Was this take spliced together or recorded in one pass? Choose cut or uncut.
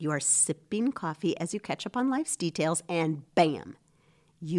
uncut